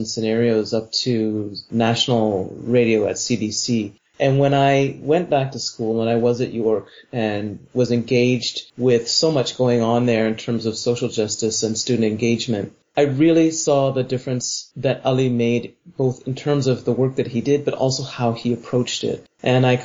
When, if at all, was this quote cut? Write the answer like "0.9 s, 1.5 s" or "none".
none